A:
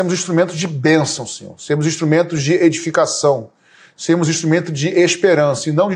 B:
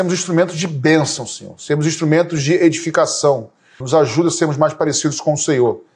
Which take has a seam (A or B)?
B